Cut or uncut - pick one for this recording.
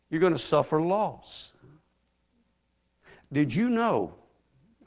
uncut